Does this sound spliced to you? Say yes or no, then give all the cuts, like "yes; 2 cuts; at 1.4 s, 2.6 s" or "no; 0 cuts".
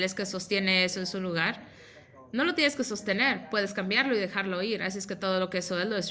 no; 0 cuts